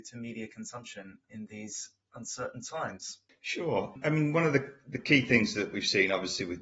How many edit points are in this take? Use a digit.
0